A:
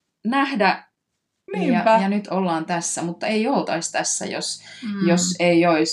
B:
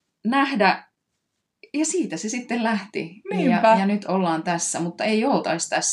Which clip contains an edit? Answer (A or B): A